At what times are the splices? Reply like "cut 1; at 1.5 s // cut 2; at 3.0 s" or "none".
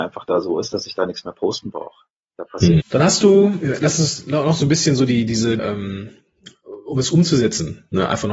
cut 1; at 2.8 s // cut 2; at 5.6 s